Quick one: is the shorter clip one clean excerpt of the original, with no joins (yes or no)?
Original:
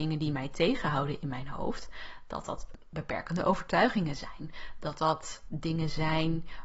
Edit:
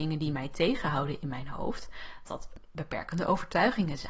no